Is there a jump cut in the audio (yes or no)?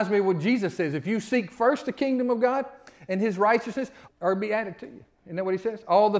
yes